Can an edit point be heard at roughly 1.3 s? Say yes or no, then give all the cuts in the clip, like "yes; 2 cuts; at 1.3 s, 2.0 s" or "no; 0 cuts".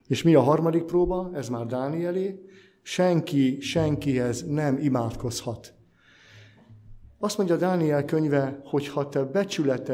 no; 0 cuts